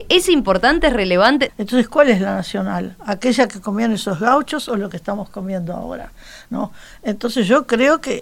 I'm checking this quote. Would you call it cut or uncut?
cut